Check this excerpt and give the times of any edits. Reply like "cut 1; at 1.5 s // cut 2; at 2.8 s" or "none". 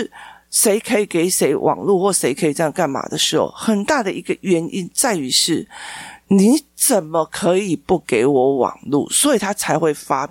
none